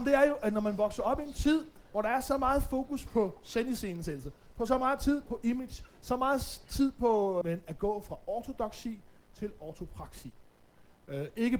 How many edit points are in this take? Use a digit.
1